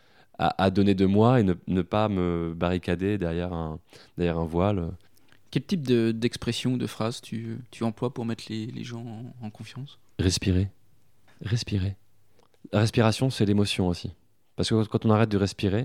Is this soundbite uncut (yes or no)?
yes